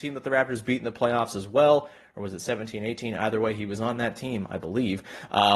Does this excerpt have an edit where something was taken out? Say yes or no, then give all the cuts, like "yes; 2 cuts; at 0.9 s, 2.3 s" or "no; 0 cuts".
no; 0 cuts